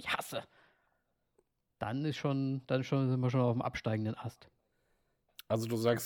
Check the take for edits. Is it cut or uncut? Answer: uncut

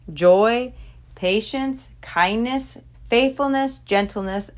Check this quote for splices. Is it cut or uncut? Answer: cut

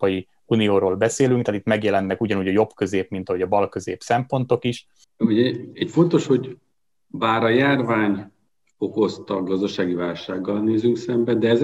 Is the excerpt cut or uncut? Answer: cut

